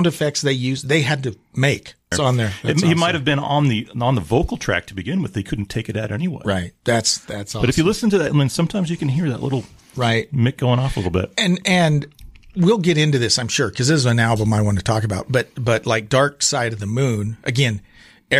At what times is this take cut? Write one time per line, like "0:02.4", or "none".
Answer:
0:02.1